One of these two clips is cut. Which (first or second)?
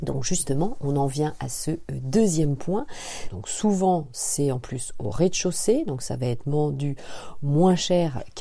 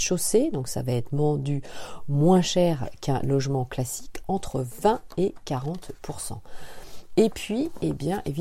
first